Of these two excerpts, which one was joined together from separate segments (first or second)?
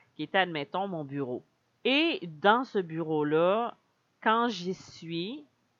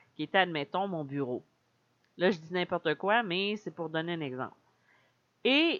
first